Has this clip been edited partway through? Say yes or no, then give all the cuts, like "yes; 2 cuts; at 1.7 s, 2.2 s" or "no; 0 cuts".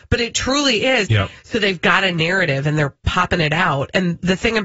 yes; 1 cut; at 1.0 s